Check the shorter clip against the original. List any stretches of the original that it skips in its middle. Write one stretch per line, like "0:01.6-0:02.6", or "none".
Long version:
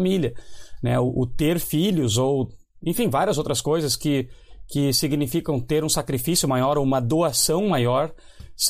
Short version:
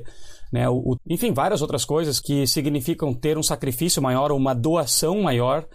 0:01.3-0:02.7
0:04.0-0:04.7